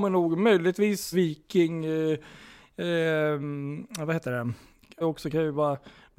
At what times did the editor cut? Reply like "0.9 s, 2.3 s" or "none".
1.1 s, 5.0 s